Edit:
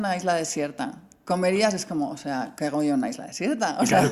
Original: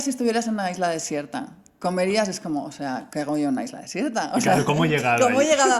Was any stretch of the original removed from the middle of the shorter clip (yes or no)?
no